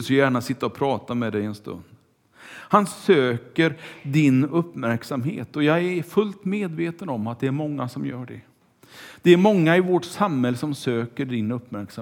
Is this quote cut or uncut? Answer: uncut